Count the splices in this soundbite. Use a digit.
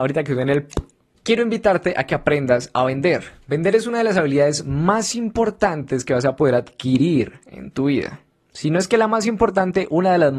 0